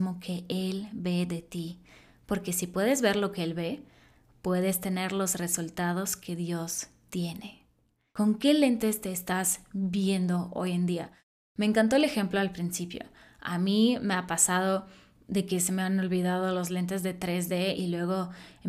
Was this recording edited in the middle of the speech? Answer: no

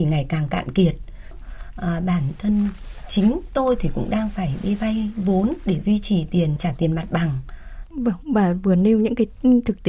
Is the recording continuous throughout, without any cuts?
no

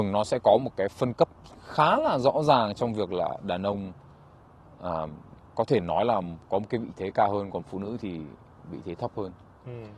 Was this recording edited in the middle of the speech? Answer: no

